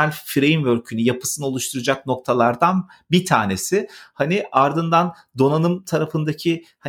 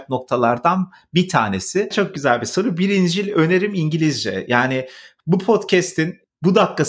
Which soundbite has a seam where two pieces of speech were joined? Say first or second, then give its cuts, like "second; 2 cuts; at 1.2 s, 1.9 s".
second; 1 cut; at 1.9 s